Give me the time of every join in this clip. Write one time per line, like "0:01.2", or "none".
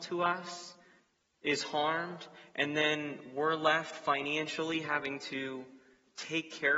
none